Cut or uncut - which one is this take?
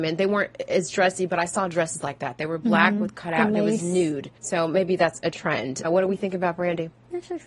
cut